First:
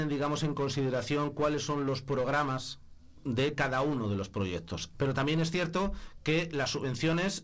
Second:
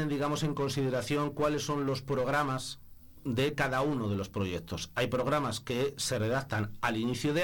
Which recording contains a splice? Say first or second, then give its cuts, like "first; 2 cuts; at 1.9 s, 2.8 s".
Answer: first; 1 cut; at 4.9 s